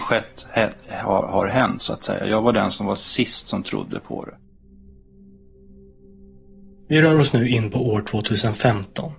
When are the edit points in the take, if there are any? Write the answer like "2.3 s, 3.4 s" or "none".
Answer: none